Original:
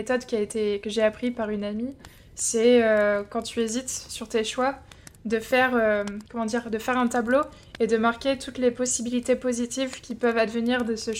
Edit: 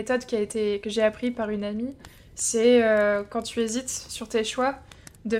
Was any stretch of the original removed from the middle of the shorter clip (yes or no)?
no